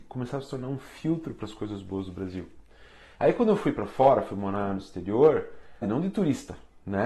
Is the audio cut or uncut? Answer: cut